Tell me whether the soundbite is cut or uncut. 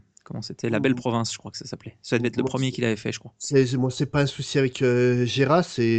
uncut